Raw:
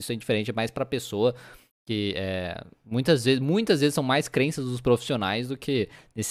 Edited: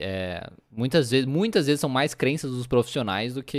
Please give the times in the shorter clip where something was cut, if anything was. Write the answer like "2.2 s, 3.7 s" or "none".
none

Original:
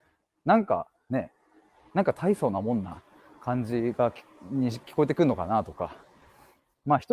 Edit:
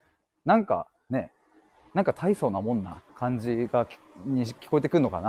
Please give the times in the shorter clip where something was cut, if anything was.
3.1 s

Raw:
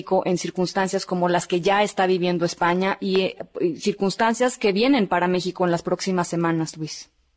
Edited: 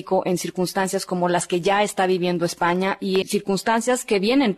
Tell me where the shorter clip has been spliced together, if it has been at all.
3.2 s

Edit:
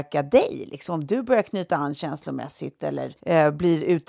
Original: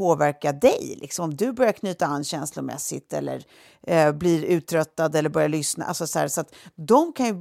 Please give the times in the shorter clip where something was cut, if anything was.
3.2 s

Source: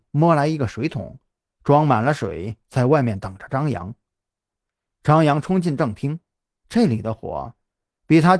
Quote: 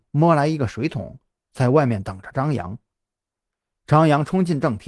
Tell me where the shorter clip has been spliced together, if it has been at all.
1.5 s

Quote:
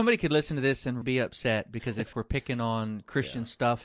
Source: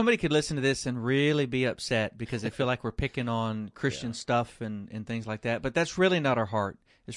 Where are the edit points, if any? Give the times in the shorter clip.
1.0 s, 2.1 s

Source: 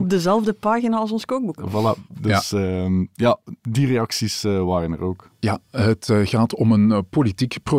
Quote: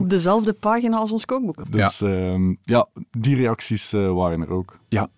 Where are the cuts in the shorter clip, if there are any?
1.6 s

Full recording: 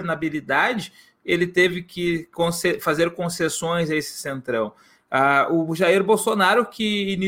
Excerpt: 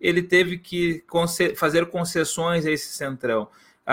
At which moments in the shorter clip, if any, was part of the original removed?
none

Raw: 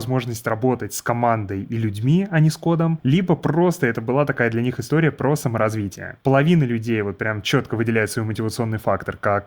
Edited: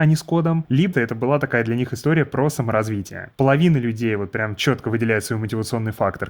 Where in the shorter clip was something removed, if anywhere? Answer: 0.9 s

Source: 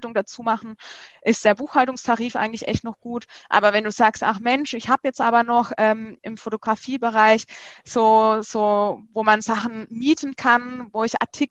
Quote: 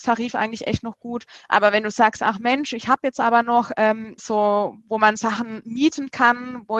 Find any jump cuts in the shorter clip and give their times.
4.2 s

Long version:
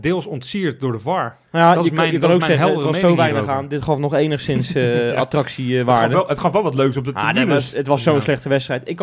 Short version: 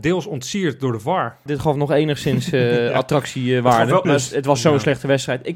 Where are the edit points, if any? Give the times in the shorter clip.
1.5 s, 4.0 s

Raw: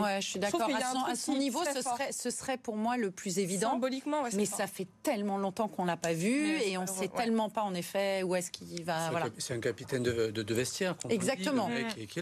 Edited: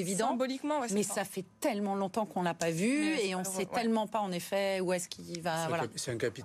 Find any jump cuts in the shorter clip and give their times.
none

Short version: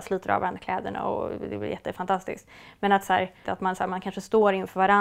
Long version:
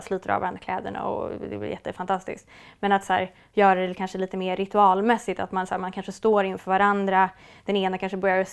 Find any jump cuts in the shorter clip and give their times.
3.4 s

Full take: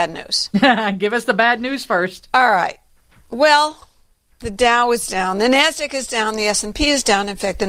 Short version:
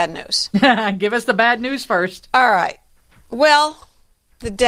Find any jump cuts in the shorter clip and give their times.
none

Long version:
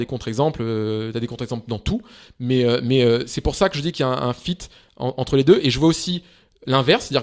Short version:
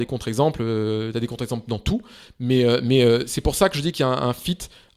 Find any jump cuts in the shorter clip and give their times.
none

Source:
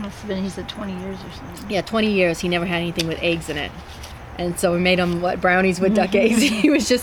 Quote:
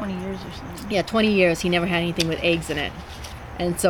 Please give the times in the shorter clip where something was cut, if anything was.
none

